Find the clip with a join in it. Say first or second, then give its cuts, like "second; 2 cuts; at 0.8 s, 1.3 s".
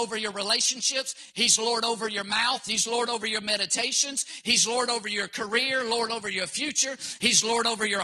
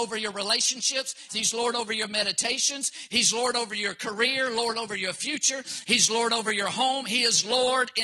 second; 1 cut; at 1.3 s